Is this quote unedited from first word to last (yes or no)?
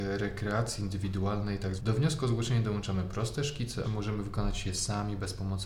no